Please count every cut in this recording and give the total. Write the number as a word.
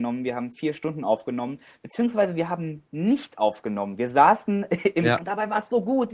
one